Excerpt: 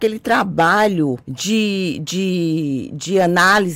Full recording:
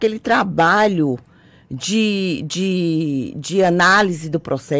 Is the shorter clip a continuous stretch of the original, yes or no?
no